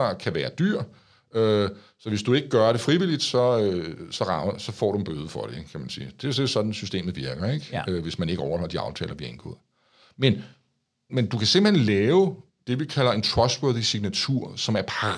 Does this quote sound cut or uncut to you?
cut